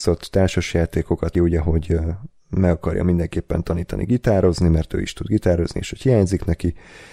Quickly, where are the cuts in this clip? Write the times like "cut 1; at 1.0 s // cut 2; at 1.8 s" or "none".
cut 1; at 1.3 s